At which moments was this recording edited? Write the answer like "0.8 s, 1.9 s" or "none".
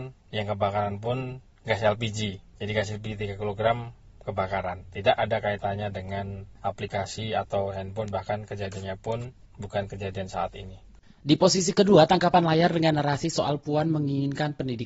11.0 s